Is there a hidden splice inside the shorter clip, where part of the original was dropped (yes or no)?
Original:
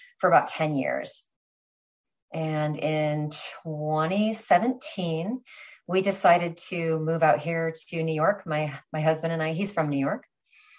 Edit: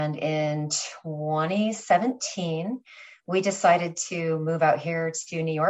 no